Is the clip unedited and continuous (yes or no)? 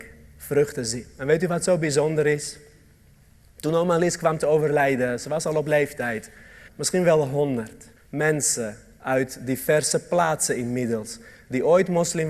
no